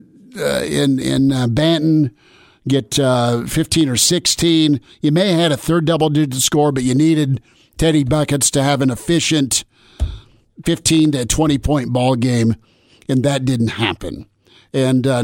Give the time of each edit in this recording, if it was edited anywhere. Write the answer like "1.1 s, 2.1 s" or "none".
none

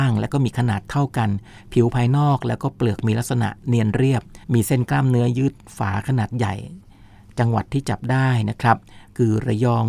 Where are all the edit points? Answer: 4.4 s

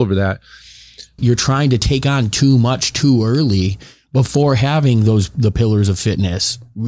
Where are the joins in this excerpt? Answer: 1.2 s

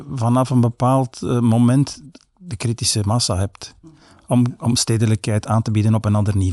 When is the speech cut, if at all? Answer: none

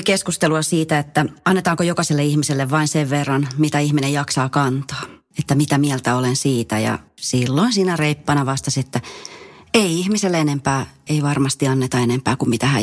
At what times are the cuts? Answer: 11.1 s

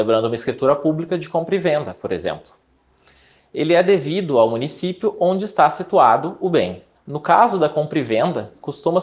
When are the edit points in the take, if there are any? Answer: 6.9 s

